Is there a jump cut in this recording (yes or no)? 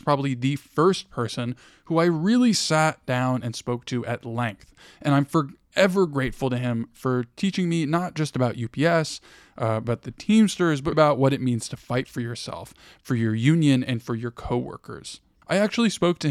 yes